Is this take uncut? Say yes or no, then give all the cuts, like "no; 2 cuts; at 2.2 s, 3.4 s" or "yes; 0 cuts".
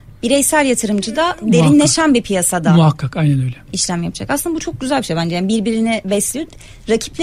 yes; 0 cuts